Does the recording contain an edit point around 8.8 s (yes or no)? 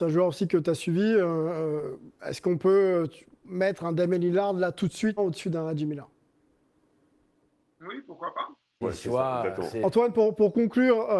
yes